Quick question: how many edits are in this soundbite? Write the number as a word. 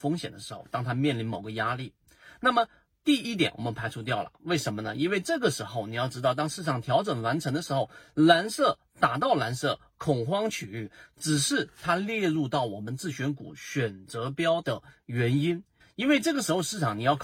two